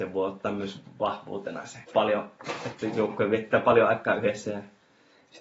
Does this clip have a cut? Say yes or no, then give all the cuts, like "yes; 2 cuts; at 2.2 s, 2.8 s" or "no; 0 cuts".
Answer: yes; 1 cut; at 1.8 s